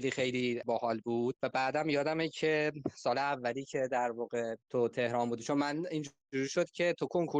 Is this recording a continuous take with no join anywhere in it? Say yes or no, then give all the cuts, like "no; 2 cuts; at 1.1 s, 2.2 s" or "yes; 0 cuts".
no; 1 cut; at 4.6 s